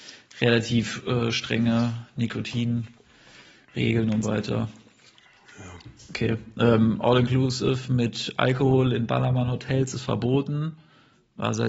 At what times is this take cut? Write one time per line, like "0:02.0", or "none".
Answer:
0:04.2

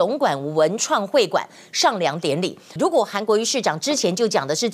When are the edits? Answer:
0:02.8

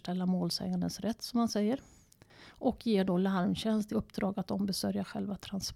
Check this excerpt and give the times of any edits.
0:03.9

